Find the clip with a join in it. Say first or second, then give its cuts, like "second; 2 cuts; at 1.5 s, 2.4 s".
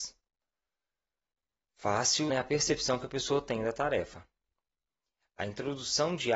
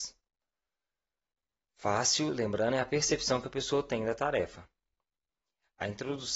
first; 1 cut; at 2.3 s